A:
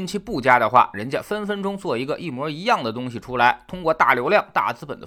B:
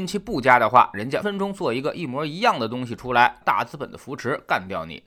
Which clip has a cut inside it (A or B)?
B